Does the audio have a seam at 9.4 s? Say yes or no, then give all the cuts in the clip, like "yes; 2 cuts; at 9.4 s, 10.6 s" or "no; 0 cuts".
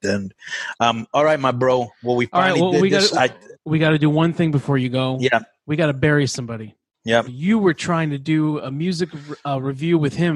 no; 1 cut; at 7.3 s